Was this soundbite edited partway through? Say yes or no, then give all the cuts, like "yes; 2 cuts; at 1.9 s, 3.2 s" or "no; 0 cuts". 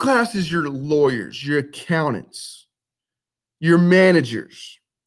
no; 0 cuts